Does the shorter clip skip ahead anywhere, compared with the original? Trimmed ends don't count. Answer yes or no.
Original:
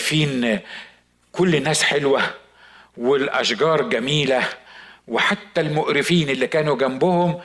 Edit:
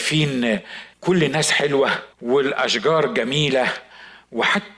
yes